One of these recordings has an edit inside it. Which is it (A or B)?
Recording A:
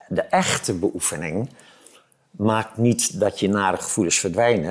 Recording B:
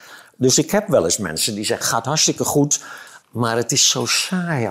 B